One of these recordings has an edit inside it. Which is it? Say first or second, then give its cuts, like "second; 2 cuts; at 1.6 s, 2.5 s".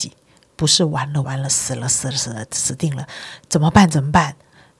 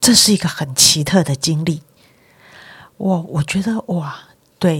first; 1 cut; at 1.2 s